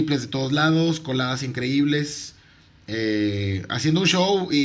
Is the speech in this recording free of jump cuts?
yes; 0 cuts

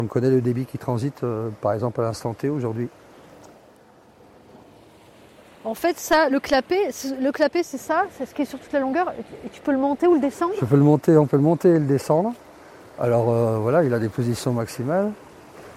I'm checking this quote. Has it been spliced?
no; 0 cuts

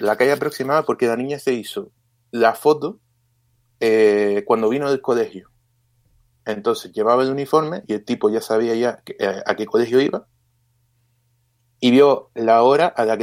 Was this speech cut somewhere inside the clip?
no; 0 cuts

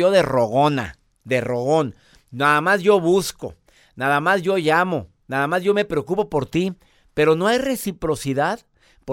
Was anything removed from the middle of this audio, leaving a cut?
no; 0 cuts

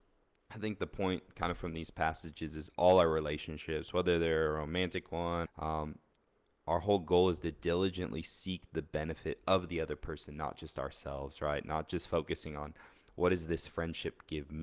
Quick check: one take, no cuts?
no; 1 cut; at 5.5 s

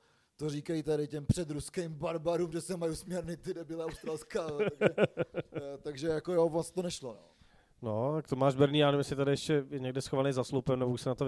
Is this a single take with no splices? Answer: yes; 0 cuts

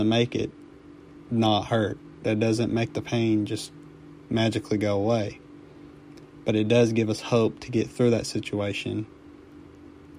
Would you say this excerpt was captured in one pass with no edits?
yes; 0 cuts

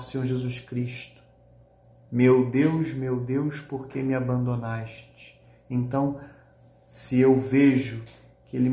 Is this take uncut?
yes; 0 cuts

